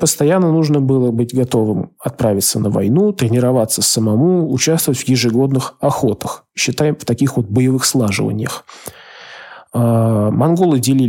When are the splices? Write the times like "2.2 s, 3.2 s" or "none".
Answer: none